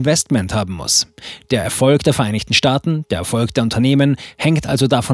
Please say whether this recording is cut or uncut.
uncut